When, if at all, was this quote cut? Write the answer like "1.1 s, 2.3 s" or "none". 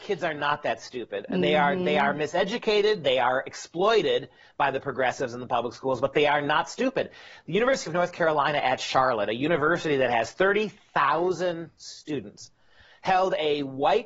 none